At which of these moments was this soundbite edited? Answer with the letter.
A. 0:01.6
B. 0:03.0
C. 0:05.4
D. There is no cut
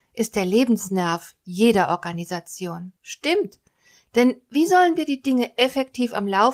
B